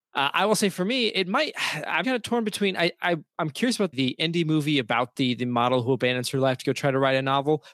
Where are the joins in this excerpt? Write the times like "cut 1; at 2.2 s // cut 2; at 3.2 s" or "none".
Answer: cut 1; at 2.0 s // cut 2; at 3.9 s